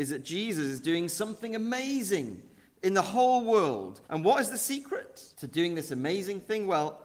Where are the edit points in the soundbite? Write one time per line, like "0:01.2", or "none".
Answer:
0:04.0
0:05.3